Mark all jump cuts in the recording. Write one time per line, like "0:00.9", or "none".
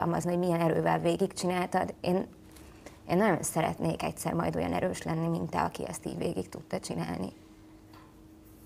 none